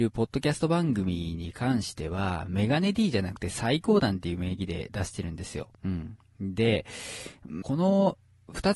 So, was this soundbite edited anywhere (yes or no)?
yes